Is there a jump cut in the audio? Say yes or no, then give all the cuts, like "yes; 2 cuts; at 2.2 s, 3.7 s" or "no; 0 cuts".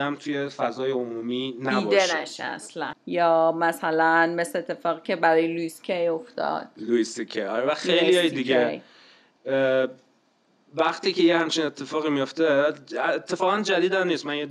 yes; 1 cut; at 2.9 s